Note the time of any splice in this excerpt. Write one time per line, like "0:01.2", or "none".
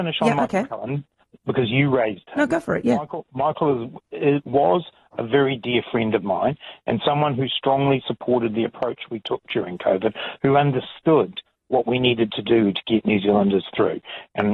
none